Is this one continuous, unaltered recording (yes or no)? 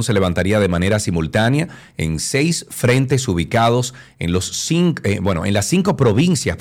yes